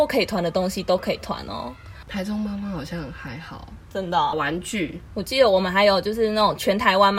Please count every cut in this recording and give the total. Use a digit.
2